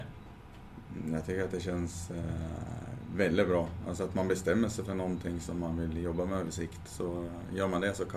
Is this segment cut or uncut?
uncut